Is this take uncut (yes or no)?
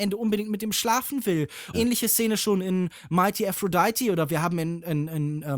no